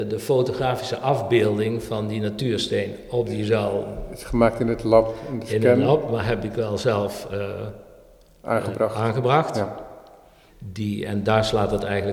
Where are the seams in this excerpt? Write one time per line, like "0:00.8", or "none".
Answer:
0:10.5